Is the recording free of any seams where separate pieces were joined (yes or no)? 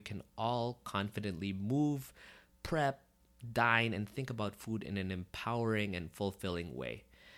yes